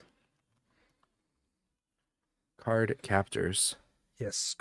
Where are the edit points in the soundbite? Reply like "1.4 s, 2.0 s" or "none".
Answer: none